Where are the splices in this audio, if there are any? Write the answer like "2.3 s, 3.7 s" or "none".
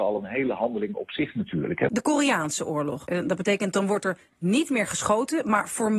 1.9 s, 3.1 s